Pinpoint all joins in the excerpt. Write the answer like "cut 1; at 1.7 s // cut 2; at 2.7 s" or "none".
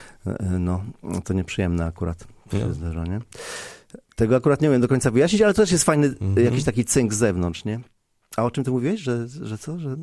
none

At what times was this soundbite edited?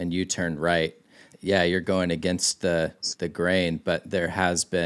cut 1; at 1.3 s

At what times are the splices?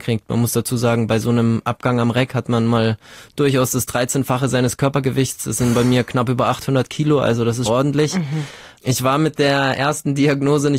cut 1; at 7.7 s

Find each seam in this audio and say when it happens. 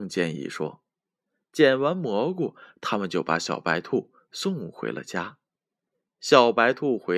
none

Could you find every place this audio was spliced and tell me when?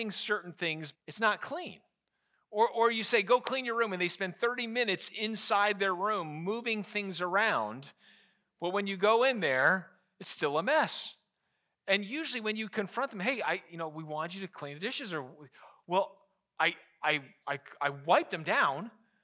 cut 1; at 0.9 s // cut 2; at 17.4 s

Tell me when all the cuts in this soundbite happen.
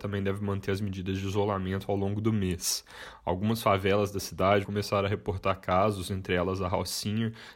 cut 1; at 4.6 s

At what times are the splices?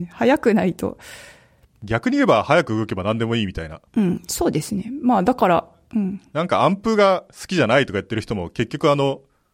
cut 1; at 3.9 s

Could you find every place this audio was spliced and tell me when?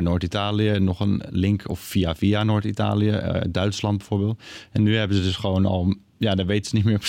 none

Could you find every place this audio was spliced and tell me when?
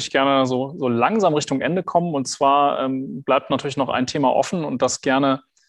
none

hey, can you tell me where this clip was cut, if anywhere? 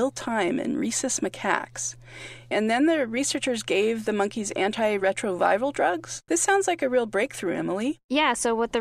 cut 1; at 2.5 s // cut 2; at 6.3 s

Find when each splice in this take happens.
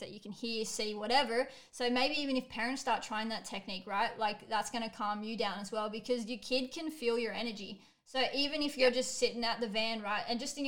none

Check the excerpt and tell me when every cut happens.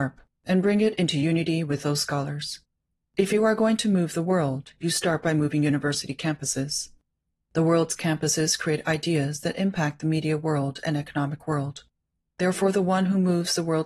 none

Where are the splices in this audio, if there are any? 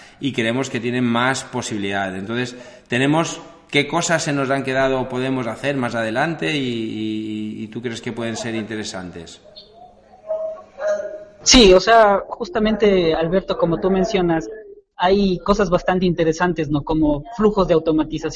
none

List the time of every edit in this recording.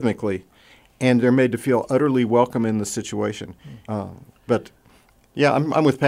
cut 1; at 3.9 s

